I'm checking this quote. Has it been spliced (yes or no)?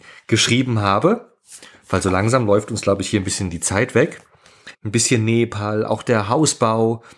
yes